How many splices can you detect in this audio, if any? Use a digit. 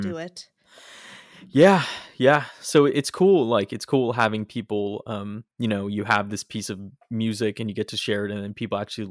1